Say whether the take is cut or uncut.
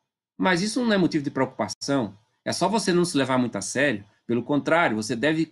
uncut